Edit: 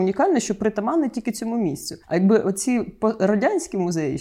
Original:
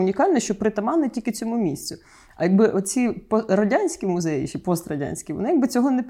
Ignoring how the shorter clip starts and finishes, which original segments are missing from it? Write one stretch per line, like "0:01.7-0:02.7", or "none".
0:02.0-0:02.3